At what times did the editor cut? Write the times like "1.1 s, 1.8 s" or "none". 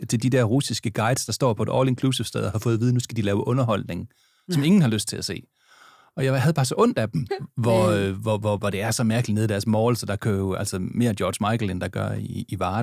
7.3 s, 8.6 s